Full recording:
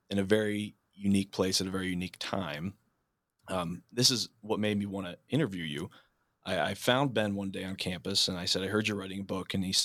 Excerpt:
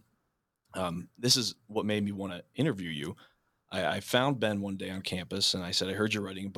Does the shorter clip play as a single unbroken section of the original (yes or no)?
yes